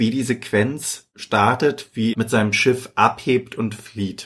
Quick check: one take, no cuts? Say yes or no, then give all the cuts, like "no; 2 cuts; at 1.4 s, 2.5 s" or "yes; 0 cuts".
no; 1 cut; at 2.1 s